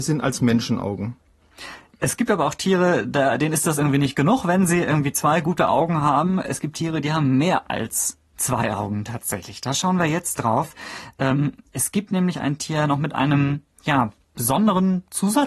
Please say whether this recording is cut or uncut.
uncut